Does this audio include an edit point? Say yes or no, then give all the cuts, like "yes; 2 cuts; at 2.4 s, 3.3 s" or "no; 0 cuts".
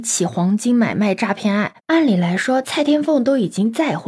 yes; 1 cut; at 1.8 s